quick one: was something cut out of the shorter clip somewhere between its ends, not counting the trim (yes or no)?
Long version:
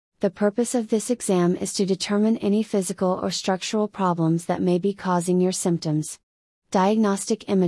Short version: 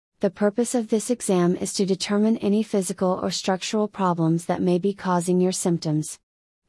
no